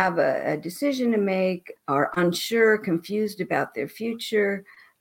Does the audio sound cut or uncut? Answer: cut